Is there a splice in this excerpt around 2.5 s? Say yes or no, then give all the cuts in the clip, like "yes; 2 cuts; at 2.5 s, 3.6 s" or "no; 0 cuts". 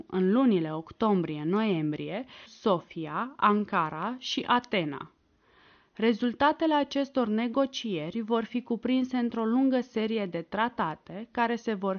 yes; 1 cut; at 2.5 s